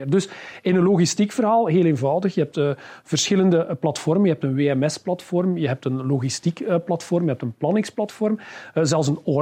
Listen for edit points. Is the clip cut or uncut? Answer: uncut